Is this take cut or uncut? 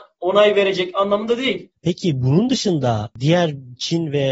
cut